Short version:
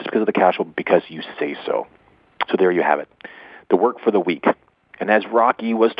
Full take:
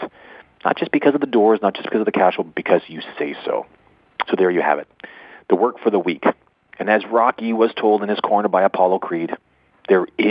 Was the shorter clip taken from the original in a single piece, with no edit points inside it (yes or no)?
yes